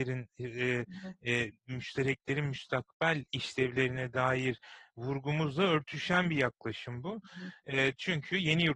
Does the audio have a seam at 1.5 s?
yes; 1 cut; at 1.5 s

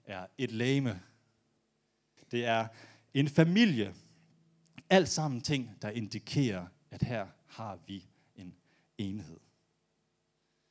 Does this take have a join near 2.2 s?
yes; 1 cut; at 2.2 s

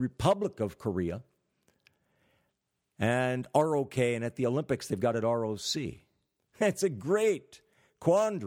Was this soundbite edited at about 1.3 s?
no; 1 cut; at 6.4 s

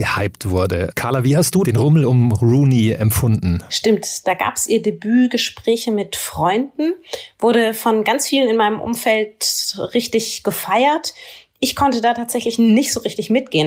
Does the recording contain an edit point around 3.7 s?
no; 0 cuts

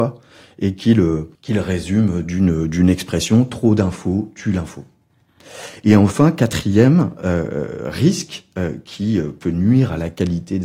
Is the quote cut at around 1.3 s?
yes; 1 cut; at 1.3 s

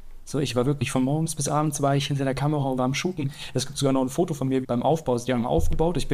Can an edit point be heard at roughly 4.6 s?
yes; 2 cuts; at 2.8 s, 4.6 s

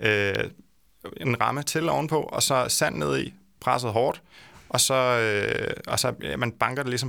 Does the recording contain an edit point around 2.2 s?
no; 0 cuts

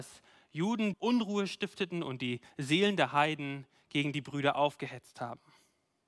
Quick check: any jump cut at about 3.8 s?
no; 1 cut; at 0.9 s

